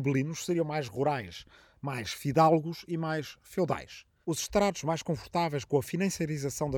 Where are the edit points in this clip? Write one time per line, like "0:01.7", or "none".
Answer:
0:04.2